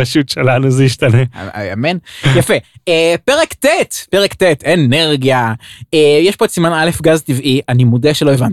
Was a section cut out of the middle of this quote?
no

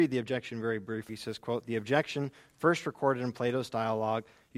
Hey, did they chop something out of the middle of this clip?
yes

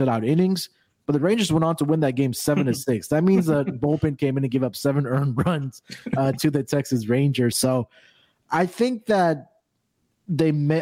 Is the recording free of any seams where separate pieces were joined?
no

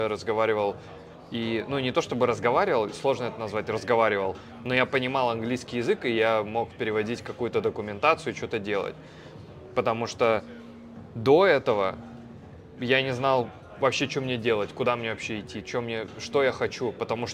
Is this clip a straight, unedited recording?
yes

